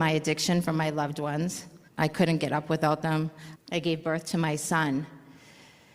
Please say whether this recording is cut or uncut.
cut